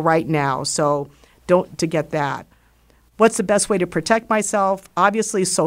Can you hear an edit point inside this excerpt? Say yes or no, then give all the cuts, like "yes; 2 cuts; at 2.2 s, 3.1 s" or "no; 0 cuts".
yes; 1 cut; at 1.7 s